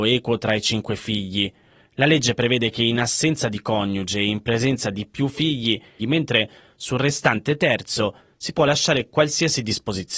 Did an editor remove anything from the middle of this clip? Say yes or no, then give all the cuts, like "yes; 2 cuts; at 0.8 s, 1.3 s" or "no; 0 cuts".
yes; 1 cut; at 6.0 s